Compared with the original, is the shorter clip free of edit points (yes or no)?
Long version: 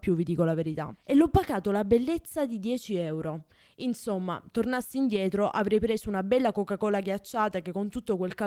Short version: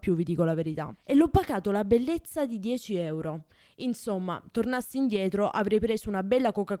yes